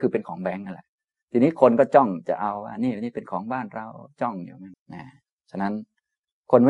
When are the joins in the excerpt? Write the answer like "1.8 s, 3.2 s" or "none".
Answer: 4.7 s